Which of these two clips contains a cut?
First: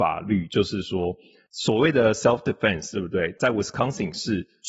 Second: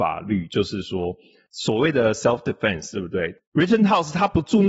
second; 1 cut; at 3.4 s

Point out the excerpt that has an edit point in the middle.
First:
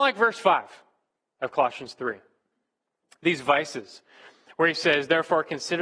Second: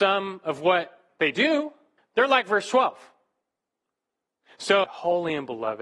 second; 2 cuts; at 2.0 s, 4.8 s

